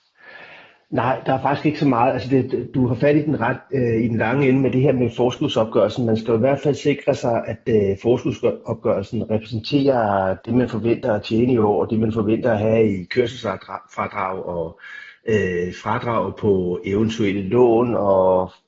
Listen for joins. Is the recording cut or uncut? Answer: uncut